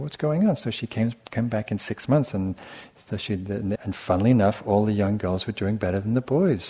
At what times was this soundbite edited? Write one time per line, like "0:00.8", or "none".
0:03.8